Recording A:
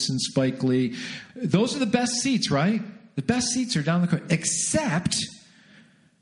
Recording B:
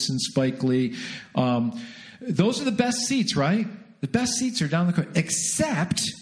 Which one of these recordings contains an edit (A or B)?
A